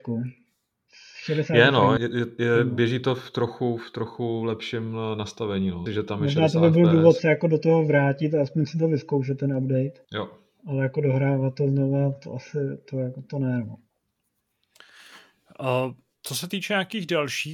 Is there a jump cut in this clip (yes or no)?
yes